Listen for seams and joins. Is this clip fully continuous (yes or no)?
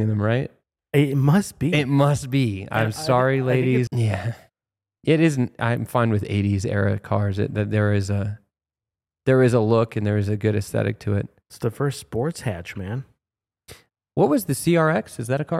no